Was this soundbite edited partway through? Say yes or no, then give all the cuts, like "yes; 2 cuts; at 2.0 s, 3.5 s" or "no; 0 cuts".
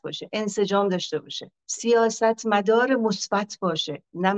yes; 1 cut; at 1.6 s